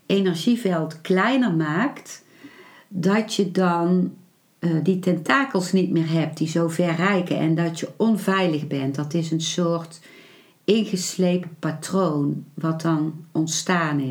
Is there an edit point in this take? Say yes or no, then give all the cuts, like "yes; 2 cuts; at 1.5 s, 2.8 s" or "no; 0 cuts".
no; 0 cuts